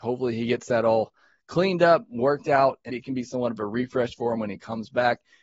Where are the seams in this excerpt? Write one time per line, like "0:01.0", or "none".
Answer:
0:02.9